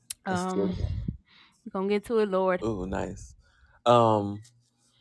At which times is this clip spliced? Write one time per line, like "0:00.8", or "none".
0:02.6